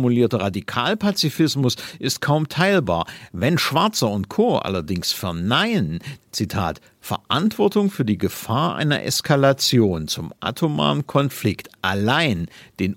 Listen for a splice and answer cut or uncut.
cut